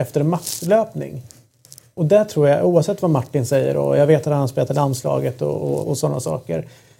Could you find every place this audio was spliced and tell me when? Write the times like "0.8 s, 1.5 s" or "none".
5.8 s